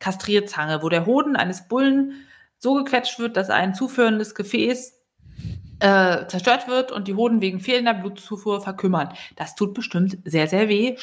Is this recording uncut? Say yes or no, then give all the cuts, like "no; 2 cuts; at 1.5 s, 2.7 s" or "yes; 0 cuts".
yes; 0 cuts